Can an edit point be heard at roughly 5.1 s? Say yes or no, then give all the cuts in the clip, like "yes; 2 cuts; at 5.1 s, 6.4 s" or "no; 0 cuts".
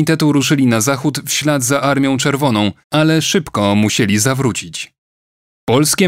no; 1 cut; at 2.8 s